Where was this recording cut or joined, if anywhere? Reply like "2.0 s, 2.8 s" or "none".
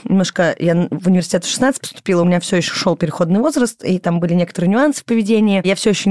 none